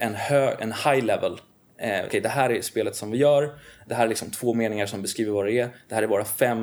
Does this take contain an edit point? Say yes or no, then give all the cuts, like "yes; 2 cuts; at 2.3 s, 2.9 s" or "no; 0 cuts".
yes; 1 cut; at 2.1 s